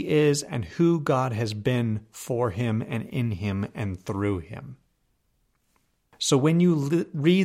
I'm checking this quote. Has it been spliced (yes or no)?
yes